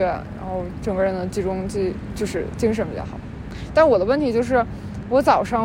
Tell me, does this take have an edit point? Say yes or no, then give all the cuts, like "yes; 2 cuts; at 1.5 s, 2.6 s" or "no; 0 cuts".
no; 0 cuts